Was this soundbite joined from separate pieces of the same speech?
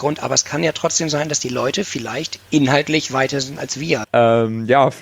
yes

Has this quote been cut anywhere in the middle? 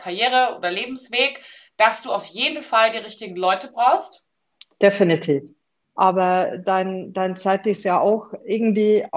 yes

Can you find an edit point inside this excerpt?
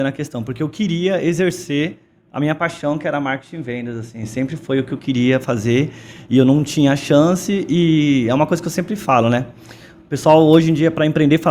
no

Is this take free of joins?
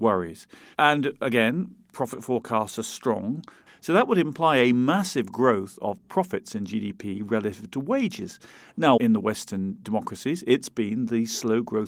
no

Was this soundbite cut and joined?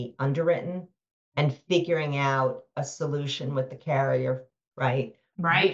yes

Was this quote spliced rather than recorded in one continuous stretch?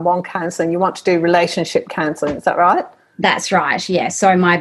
no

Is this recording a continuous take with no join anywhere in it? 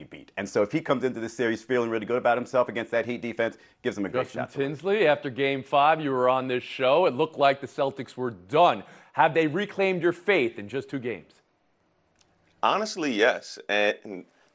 yes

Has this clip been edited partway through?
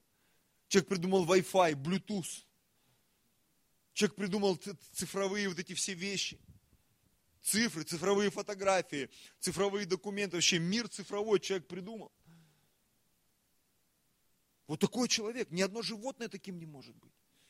no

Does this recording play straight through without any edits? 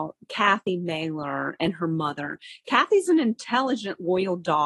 yes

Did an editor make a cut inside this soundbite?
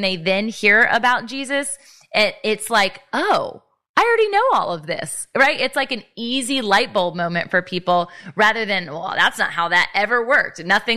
no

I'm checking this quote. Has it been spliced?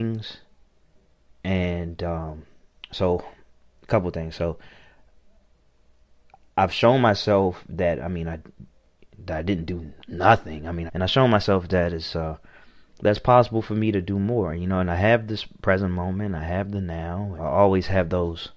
yes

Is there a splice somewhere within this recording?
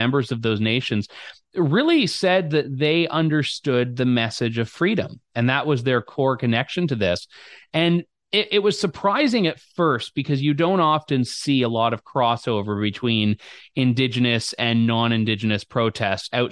no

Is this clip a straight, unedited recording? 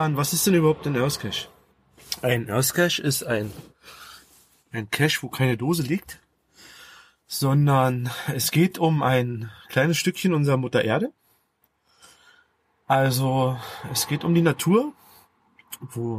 yes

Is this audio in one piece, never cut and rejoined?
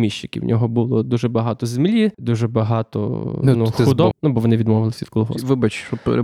no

